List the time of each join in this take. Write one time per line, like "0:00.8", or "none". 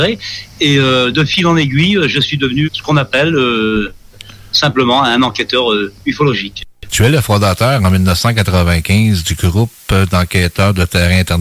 0:02.6